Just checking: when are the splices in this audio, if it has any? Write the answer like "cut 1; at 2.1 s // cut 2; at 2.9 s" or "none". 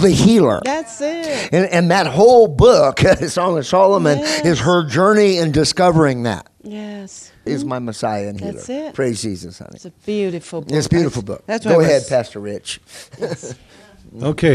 cut 1; at 7.5 s